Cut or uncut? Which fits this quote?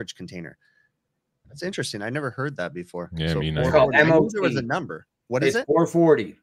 cut